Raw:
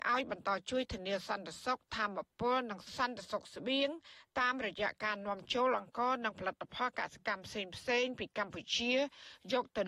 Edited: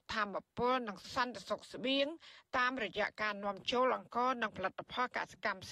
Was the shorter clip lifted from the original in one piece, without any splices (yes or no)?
yes